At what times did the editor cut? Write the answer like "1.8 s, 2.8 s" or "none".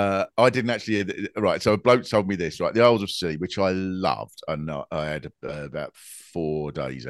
none